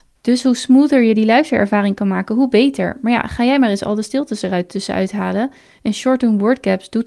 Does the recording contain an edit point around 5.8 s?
no; 0 cuts

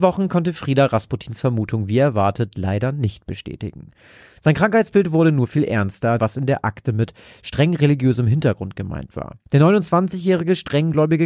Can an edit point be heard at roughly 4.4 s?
no; 2 cuts; at 6.2 s, 9.5 s

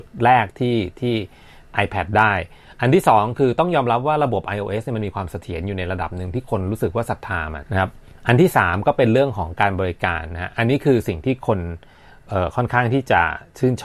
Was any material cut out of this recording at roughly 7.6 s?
yes; 1 cut; at 7.6 s

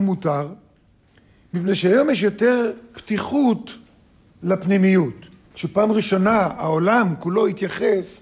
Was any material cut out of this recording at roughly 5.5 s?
yes; 1 cut; at 5.5 s

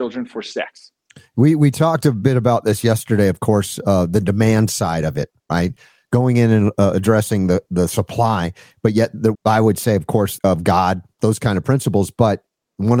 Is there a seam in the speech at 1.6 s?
no; 2 cuts; at 9.3 s, 10.4 s

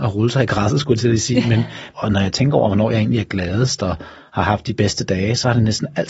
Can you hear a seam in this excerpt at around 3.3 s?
no; 1 cut; at 1.9 s

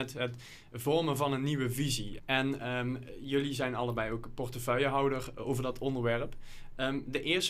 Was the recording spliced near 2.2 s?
yes; 1 cut; at 2.2 s

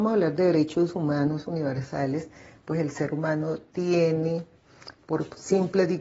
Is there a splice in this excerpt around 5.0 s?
yes; 1 cut; at 5.0 s

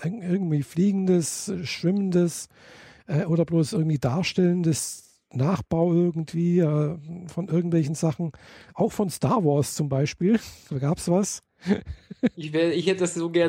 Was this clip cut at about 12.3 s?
yes; 1 cut; at 12.3 s

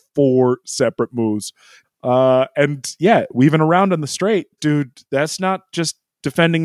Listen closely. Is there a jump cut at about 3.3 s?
no; 2 cuts; at 1.8 s, 4.6 s

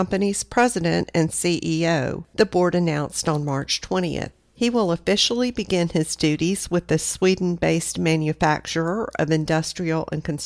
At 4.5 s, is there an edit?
no; 0 cuts

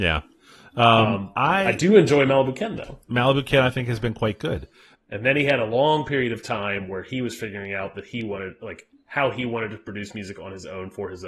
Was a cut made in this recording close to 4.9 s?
yes; 1 cut; at 4.9 s

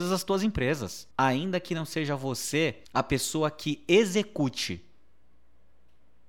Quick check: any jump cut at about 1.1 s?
yes; 2 cuts; at 1.1 s, 2.8 s

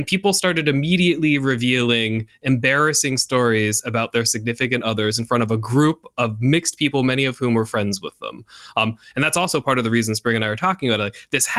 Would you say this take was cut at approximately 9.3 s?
no; 0 cuts

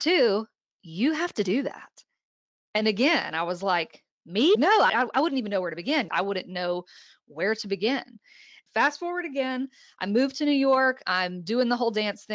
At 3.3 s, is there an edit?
no; 2 cuts; at 6.1 s, 8.7 s

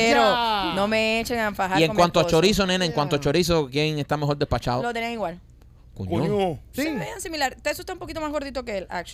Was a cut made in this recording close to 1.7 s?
no; 1 cut; at 6.7 s

